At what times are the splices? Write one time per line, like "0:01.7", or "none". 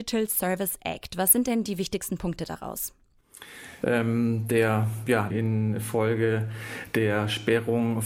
0:03.8
0:05.3